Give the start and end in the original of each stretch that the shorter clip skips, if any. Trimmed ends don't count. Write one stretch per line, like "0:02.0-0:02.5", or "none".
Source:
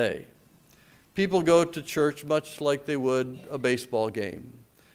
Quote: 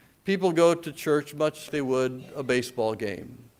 0:02.6-0:02.8